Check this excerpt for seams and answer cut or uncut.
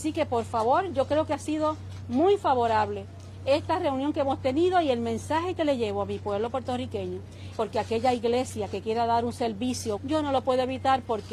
cut